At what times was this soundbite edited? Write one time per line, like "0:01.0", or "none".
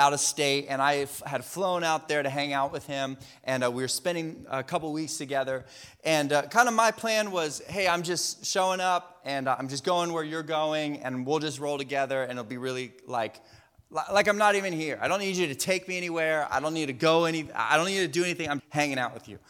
0:18.6